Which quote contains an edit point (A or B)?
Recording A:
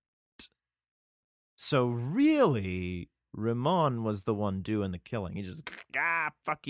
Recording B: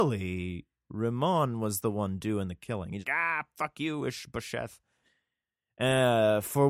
B